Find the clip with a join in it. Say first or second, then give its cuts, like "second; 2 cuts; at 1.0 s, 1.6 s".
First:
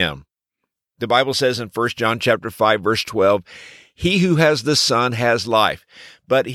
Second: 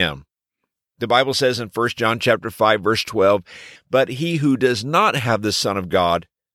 second; 1 cut; at 3.8 s